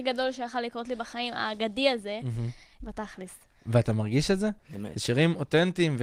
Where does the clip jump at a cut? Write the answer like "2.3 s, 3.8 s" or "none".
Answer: 2.8 s, 4.6 s